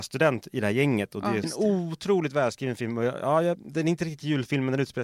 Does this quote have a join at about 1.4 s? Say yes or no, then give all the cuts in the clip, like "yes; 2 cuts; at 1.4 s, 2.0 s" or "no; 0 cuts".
yes; 1 cut; at 1.4 s